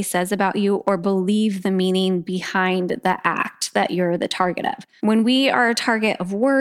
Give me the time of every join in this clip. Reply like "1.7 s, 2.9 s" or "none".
5.0 s